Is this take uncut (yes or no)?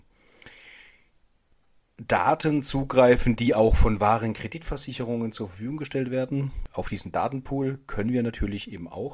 yes